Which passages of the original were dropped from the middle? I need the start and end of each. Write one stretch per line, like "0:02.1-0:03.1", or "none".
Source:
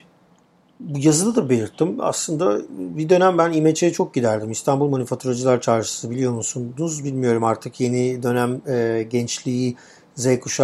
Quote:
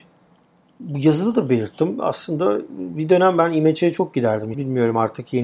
0:04.5-0:07.0